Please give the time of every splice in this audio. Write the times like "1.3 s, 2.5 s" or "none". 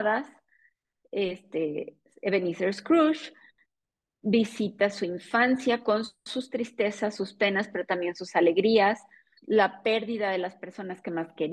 9.4 s